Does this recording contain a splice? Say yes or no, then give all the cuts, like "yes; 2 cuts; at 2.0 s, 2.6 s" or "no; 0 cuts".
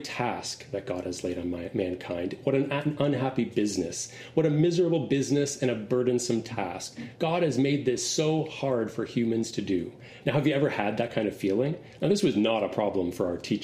yes; 3 cuts; at 7.2 s, 10.2 s, 12.0 s